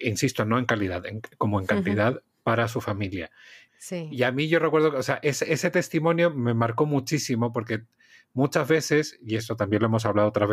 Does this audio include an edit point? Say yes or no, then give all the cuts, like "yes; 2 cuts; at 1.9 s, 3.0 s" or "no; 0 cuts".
yes; 1 cut; at 3.7 s